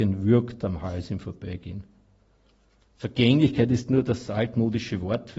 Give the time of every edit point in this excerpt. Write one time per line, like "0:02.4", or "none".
none